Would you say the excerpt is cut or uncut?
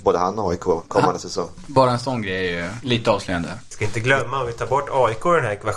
cut